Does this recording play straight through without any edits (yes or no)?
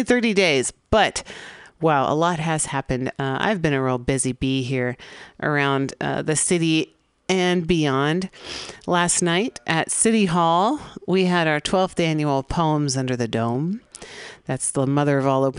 yes